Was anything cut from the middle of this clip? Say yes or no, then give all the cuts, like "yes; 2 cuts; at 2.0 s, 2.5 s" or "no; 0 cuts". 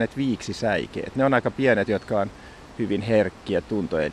yes; 1 cut; at 1.9 s